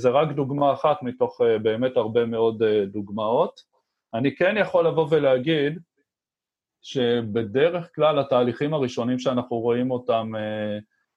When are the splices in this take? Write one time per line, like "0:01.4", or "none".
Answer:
none